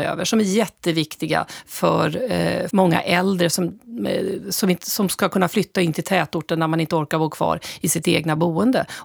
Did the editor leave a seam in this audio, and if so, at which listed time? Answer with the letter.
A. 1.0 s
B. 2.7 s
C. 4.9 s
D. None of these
B